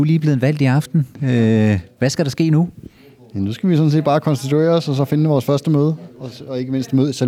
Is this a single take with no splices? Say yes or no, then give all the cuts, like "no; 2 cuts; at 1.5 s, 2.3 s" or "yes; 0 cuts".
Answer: no; 1 cut; at 6.1 s